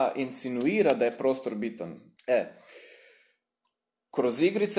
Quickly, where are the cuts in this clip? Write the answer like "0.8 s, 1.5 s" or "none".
2.2 s